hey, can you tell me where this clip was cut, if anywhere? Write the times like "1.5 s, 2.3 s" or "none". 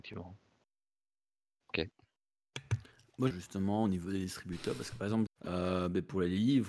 3.3 s, 5.3 s